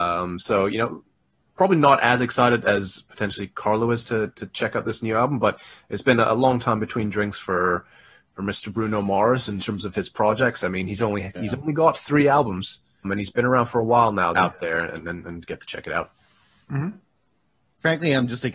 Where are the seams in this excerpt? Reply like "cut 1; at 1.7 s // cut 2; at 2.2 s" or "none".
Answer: cut 1; at 13.0 s // cut 2; at 14.3 s